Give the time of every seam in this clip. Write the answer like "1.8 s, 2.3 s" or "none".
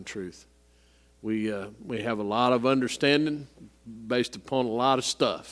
none